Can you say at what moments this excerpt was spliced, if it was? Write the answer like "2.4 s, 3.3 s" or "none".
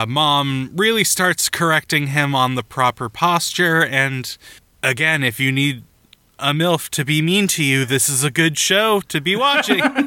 none